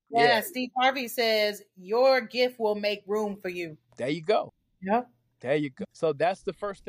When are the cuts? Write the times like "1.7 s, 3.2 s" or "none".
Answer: 3.9 s, 5.8 s